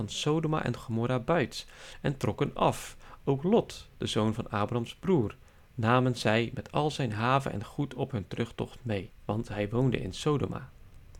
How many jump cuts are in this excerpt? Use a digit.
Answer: 1